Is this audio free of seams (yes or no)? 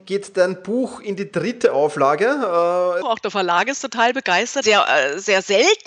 no